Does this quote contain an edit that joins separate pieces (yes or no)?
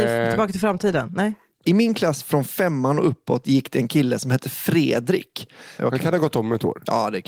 yes